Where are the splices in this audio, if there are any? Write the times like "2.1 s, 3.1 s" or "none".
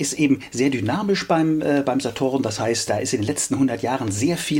2.9 s

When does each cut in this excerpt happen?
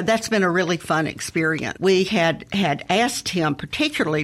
1.8 s

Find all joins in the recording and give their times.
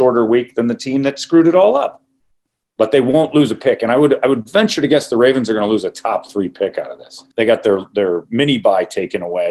7.3 s

